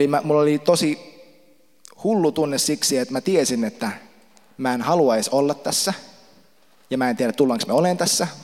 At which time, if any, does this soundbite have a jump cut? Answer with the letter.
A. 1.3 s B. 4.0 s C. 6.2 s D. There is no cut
D